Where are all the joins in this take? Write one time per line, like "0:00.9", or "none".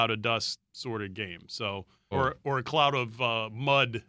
0:02.1